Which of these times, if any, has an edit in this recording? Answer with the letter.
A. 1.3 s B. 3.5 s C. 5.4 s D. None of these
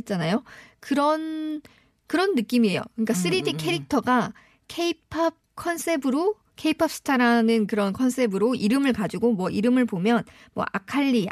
C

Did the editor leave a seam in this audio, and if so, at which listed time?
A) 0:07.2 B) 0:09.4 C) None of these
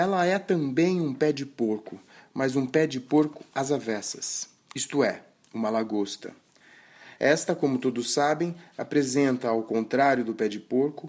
C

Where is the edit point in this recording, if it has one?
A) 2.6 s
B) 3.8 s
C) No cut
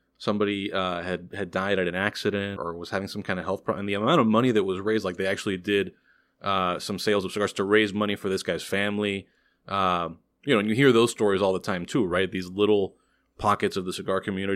A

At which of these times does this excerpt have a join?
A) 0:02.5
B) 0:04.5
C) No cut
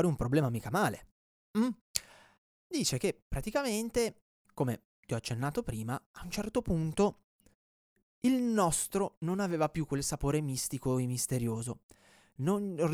A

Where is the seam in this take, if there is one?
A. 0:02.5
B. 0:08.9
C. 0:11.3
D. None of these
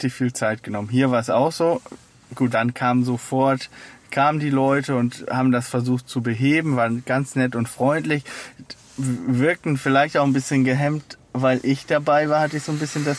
A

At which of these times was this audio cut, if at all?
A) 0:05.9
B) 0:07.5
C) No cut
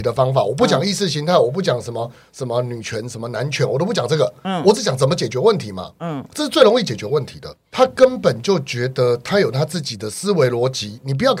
B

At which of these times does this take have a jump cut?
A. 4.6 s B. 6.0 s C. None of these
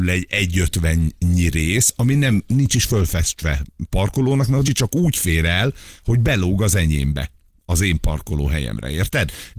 A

